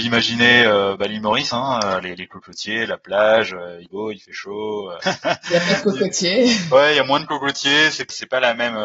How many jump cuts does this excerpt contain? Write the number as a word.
two